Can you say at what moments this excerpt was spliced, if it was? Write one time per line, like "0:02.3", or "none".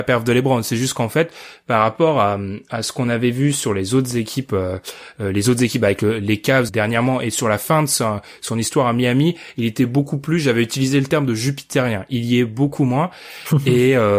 0:06.7